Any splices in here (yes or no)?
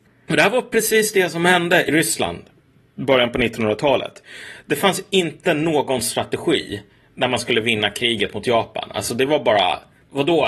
yes